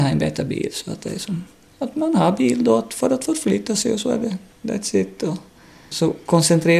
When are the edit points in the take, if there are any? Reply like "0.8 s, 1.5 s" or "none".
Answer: none

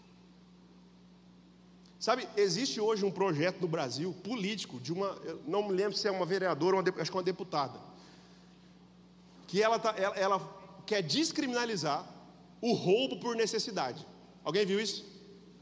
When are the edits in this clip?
none

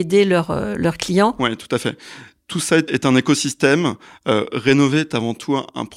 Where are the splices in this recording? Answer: none

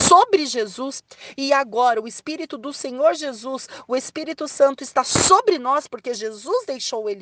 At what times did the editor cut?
none

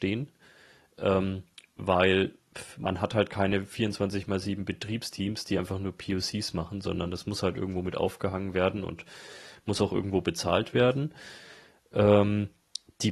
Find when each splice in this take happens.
none

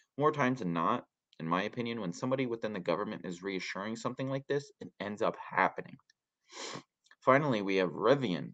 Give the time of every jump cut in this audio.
none

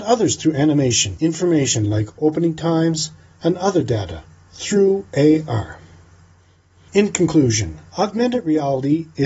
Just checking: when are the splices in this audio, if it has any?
7.9 s

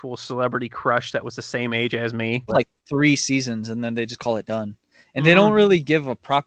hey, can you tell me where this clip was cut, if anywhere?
2.5 s

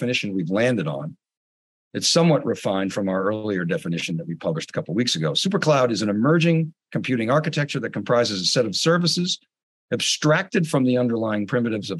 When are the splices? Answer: none

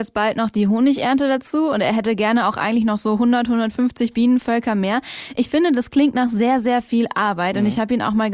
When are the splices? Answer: none

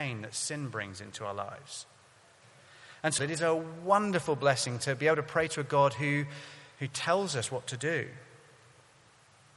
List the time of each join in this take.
3.2 s, 6.8 s

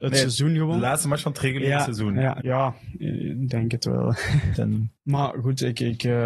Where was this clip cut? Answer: 2.4 s, 4.5 s

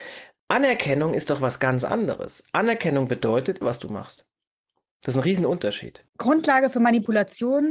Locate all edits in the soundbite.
3.6 s, 6.1 s

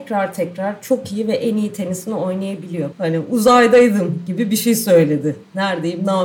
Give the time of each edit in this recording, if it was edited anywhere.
2.9 s

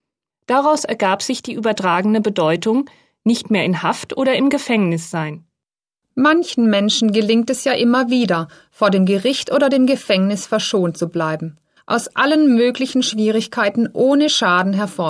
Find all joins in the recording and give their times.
11.8 s

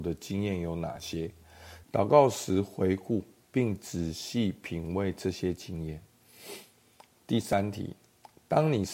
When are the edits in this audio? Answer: 1.8 s

